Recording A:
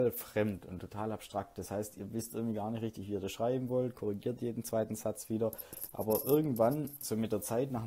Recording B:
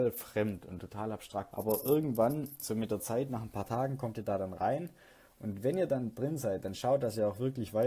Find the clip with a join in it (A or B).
B